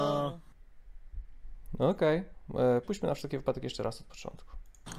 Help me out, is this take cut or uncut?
cut